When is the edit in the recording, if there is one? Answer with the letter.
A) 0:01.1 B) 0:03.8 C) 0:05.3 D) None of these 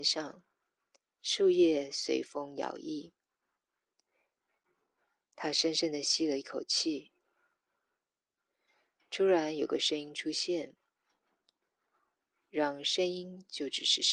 A